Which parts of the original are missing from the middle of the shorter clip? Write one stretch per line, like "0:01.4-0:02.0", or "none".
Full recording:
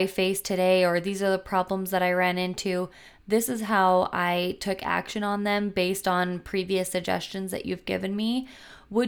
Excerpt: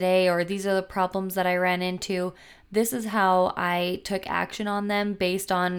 none